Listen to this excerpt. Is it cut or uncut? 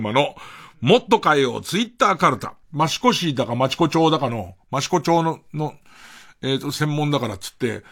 cut